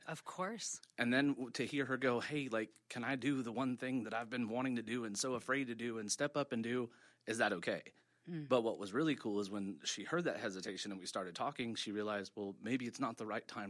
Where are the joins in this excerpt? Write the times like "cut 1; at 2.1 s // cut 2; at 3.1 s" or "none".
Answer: none